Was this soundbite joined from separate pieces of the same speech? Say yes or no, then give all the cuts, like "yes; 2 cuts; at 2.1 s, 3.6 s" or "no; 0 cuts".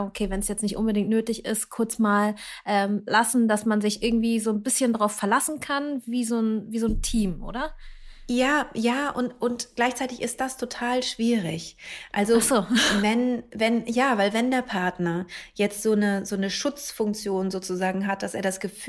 no; 0 cuts